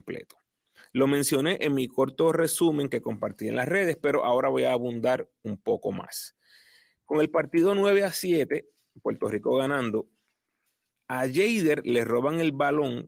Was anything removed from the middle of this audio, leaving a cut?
no; 0 cuts

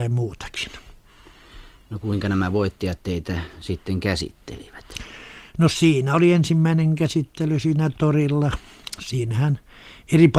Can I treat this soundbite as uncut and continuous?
yes; 0 cuts

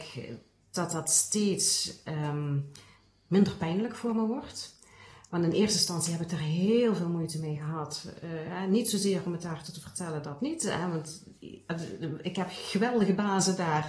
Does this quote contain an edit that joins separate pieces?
no; 0 cuts

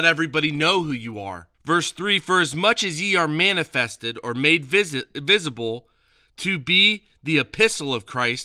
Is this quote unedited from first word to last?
no; 1 cut; at 1.5 s

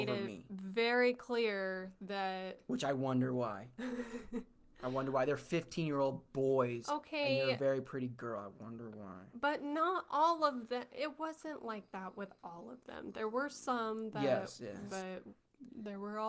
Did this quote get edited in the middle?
yes; 1 cut; at 14.9 s

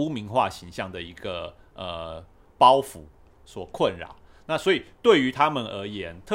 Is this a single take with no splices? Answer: yes; 0 cuts

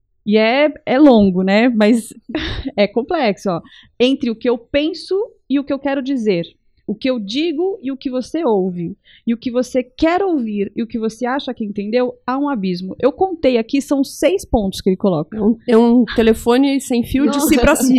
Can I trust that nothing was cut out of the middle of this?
yes; 0 cuts

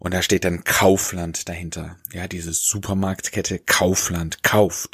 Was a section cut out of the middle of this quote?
no; 0 cuts

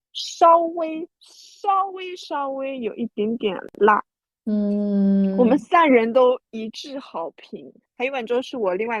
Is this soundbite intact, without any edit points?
no; 1 cut; at 7.8 s

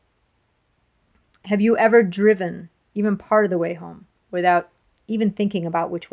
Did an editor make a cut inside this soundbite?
no; 0 cuts

